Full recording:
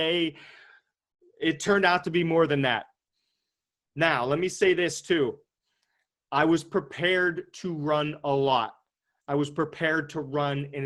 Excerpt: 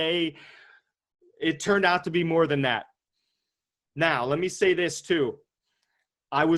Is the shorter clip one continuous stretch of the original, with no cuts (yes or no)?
yes